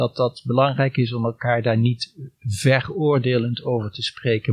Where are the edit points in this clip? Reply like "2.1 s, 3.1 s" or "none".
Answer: none